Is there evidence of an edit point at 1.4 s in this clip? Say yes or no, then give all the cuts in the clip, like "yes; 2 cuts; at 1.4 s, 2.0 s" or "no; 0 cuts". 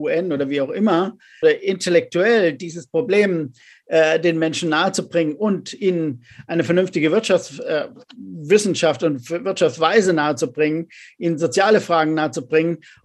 yes; 1 cut; at 1.4 s